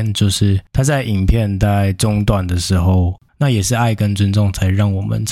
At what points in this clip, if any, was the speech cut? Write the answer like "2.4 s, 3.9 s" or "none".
3.3 s